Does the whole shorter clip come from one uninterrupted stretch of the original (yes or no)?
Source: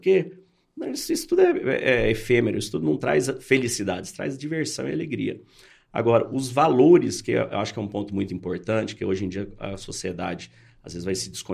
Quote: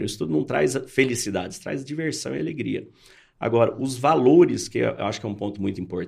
yes